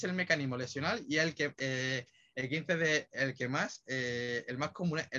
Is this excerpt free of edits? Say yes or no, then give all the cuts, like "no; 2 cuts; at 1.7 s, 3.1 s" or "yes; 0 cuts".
no; 1 cut; at 1.5 s